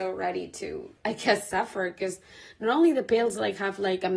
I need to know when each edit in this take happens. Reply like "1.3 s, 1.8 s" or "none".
1.0 s